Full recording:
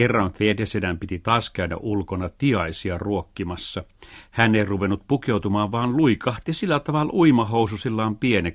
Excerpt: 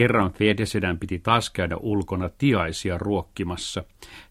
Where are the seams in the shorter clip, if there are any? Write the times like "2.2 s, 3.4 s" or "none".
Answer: none